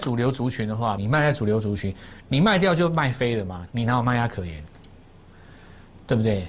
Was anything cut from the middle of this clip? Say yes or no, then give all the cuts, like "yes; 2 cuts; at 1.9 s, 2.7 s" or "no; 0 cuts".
yes; 2 cuts; at 1.0 s, 3.7 s